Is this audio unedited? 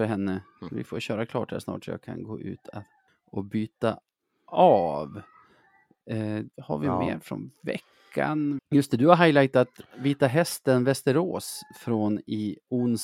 no; 1 cut; at 8.6 s

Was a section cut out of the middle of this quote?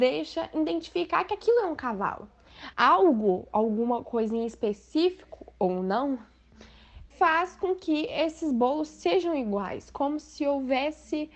yes; 2 cuts; at 2.7 s, 7.1 s

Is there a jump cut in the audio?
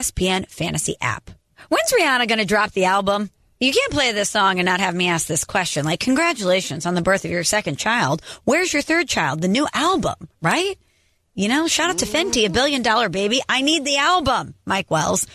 no; 0 cuts

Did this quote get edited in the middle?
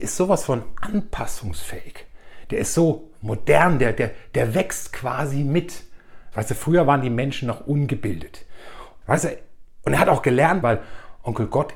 yes; 3 cuts; at 6.3 s, 9.0 s, 10.6 s

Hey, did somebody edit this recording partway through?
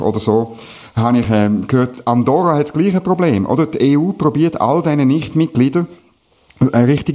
no; 0 cuts

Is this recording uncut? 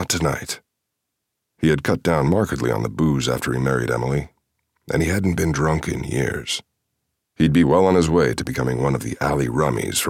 no; 1 cut; at 7.2 s

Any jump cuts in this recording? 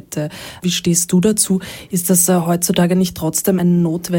no; 0 cuts

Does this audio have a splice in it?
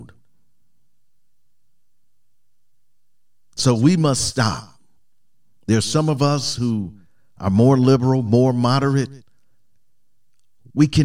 no; 0 cuts

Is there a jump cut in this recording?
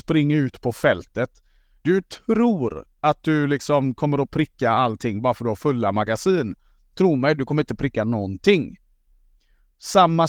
no; 0 cuts

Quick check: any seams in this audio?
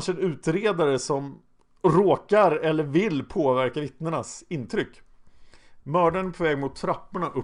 yes; 1 cut; at 5.8 s

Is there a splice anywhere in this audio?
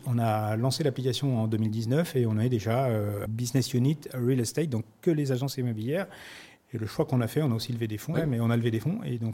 yes; 2 cuts; at 3.3 s, 8.1 s

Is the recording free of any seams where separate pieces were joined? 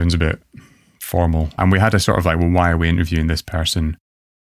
no; 1 cut; at 1.6 s

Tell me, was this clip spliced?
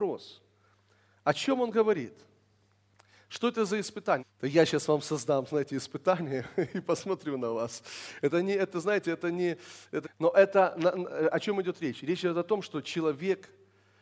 yes; 2 cuts; at 4.2 s, 10.0 s

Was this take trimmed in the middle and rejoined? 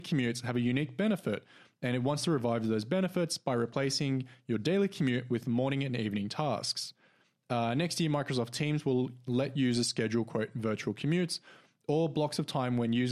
no; 0 cuts

